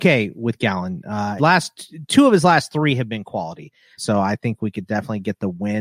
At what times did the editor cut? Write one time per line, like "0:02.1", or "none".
0:01.4
0:04.0

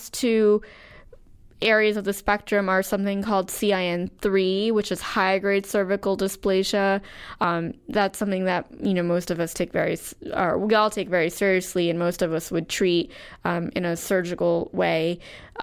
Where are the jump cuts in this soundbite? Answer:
0:07.4

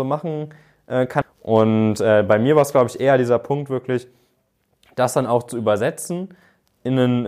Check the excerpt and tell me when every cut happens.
0:01.2

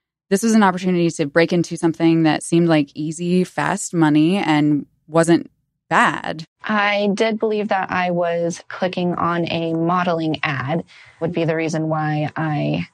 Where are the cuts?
0:11.2

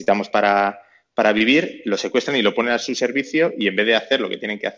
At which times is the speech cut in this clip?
none

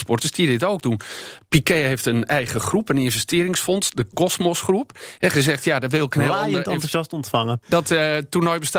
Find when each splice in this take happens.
0:05.2
0:07.6

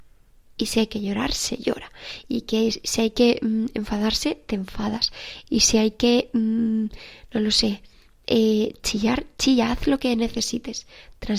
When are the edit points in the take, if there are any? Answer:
none

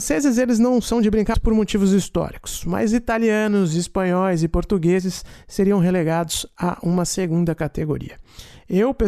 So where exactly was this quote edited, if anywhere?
0:01.3

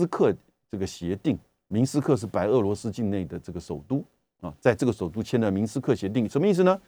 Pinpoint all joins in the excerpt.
none

